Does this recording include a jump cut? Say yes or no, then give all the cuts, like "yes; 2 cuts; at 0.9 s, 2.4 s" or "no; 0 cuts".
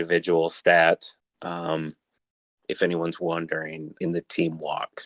yes; 2 cuts; at 2.6 s, 4.0 s